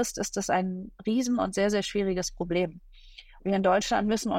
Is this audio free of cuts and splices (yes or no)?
no